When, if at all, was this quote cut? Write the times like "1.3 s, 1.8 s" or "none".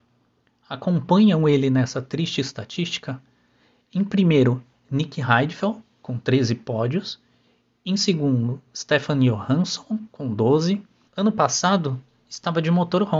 11.1 s